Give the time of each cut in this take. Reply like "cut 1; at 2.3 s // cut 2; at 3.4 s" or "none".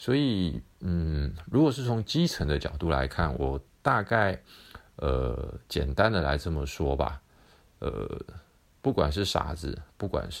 none

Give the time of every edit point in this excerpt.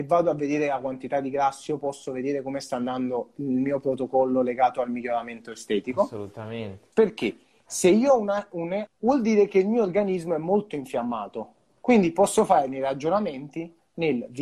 cut 1; at 6.9 s // cut 2; at 8.9 s

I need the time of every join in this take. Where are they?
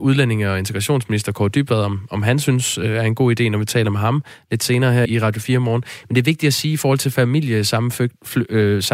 cut 1; at 5.1 s

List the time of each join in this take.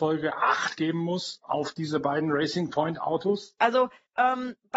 cut 1; at 3.6 s

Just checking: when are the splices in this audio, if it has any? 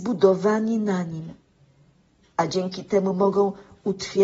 none

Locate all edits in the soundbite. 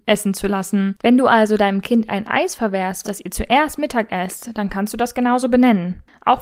cut 1; at 1.0 s // cut 2; at 3.0 s

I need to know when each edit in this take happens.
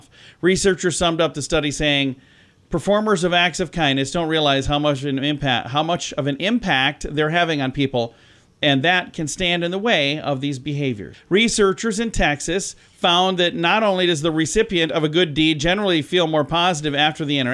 cut 1; at 11.1 s

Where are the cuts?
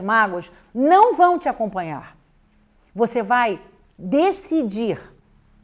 none

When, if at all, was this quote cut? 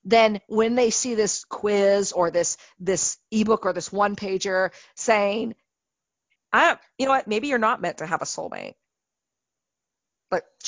cut 1; at 6.4 s

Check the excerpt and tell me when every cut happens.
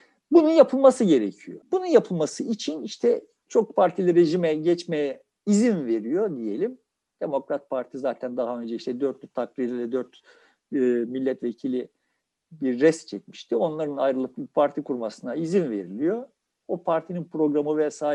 none

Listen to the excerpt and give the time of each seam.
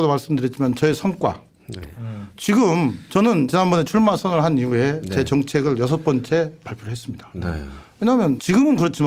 cut 1; at 1.8 s

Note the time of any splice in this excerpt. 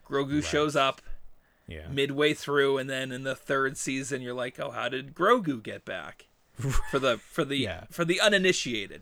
none

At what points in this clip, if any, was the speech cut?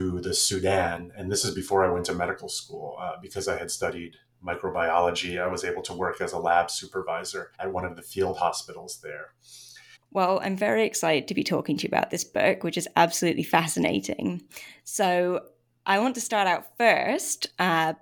cut 1; at 7.5 s // cut 2; at 10.0 s

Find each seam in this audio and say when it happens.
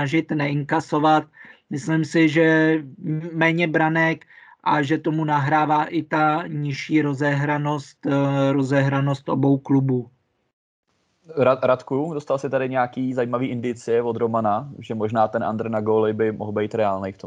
none

